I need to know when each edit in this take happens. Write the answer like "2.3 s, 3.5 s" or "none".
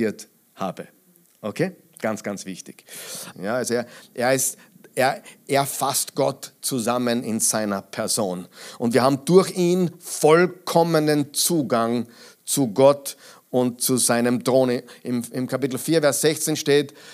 3.3 s